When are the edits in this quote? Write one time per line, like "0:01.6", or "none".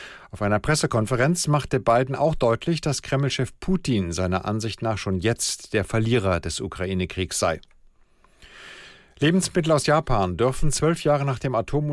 none

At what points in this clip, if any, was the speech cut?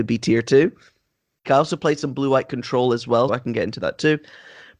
0:01.4
0:03.3

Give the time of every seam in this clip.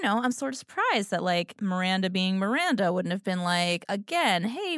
none

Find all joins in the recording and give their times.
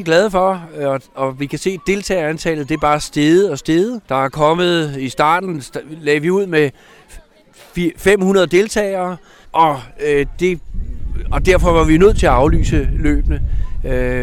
0:04.0
0:09.4

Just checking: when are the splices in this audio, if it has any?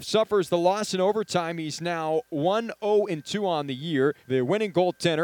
0:04.2

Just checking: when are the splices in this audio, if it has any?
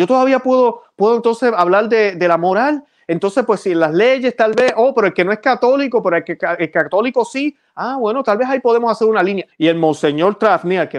0:09.5

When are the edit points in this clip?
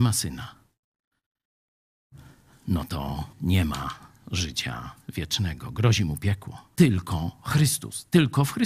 0:03.3
0:06.7

